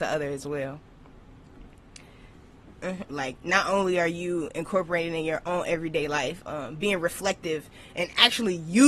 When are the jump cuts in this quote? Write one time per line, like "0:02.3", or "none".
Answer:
0:03.1

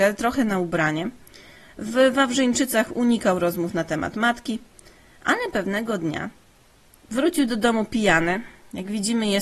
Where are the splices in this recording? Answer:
0:07.0

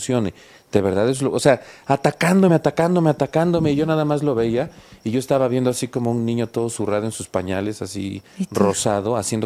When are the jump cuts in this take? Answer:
none

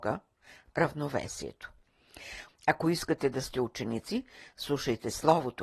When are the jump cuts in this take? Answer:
0:02.5

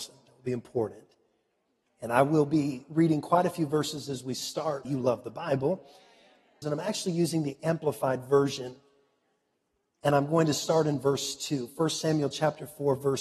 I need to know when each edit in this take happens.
0:01.8
0:04.8
0:06.6

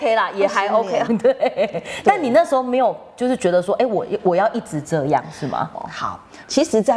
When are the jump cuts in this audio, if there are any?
0:01.0
0:05.7

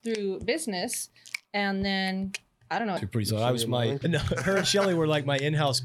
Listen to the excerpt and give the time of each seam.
0:03.0
0:04.0

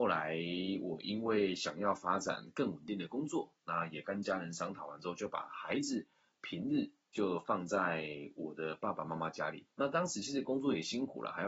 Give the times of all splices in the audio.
0:09.7

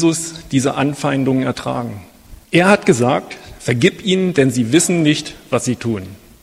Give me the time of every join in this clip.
0:02.4

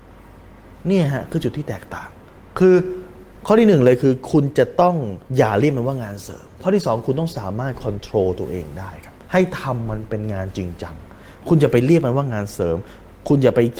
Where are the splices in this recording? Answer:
0:05.3
0:09.2

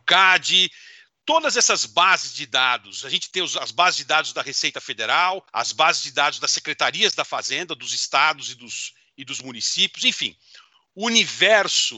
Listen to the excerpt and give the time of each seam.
0:05.5

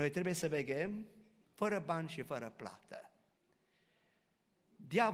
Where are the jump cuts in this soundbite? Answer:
0:01.4

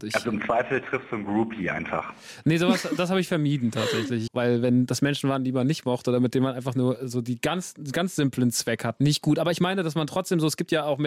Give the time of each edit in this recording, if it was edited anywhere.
0:04.3
0:09.0

